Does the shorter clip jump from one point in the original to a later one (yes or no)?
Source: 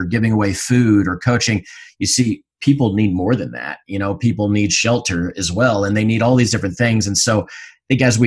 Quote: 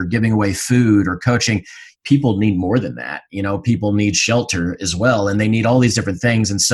yes